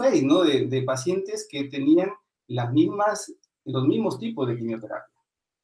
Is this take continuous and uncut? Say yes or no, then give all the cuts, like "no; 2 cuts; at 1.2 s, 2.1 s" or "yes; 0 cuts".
yes; 0 cuts